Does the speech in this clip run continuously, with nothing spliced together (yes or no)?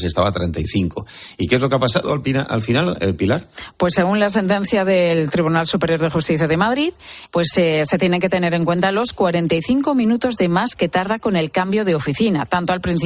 no